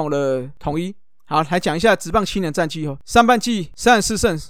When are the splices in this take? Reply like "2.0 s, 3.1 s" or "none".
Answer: none